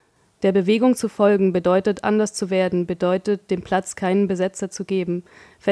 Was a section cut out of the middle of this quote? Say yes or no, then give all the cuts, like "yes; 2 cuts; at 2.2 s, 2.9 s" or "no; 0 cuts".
no; 0 cuts